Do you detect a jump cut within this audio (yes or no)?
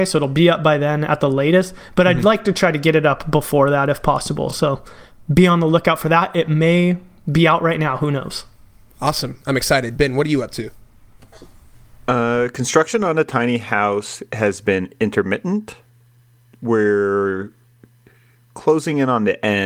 no